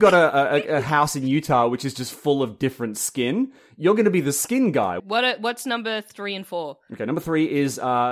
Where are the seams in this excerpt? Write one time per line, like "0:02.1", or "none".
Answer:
0:05.0